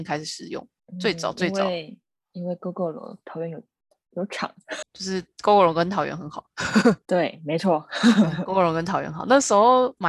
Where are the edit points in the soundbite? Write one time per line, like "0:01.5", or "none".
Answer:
0:04.8